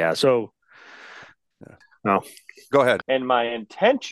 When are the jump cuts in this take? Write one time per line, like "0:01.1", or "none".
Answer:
0:01.8
0:03.0